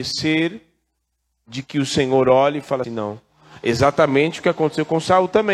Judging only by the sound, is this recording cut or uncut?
cut